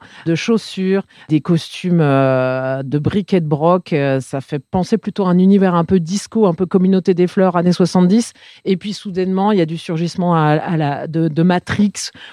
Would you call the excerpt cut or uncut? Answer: uncut